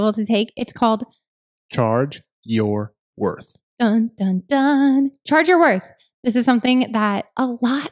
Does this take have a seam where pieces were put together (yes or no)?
no